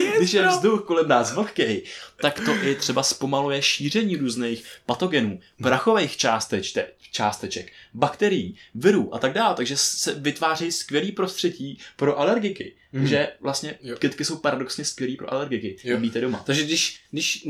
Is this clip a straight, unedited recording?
yes; 0 cuts

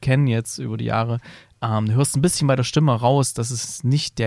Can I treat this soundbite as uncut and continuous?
yes; 0 cuts

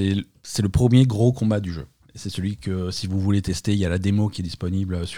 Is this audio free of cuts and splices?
yes; 0 cuts

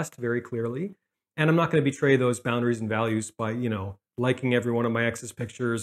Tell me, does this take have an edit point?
no; 0 cuts

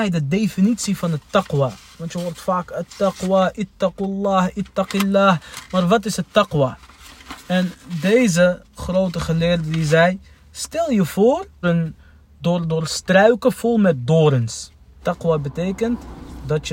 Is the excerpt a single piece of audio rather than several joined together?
no; 2 cuts; at 11.6 s, 15.0 s

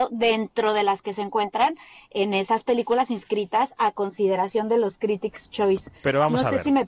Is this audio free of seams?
yes; 0 cuts

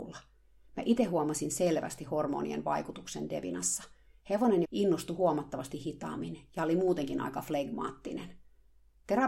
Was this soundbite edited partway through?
yes; 1 cut; at 4.6 s

